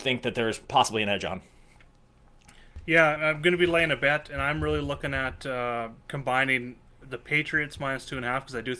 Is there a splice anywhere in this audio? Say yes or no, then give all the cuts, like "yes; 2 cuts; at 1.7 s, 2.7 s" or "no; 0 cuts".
yes; 1 cut; at 3.2 s